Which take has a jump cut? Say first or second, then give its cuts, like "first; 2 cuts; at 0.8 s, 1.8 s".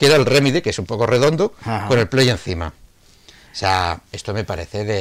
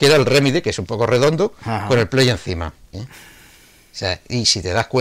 second; 1 cut; at 2.9 s